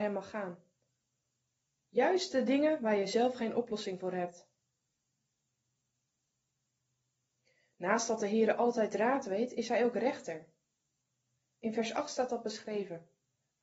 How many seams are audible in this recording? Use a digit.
0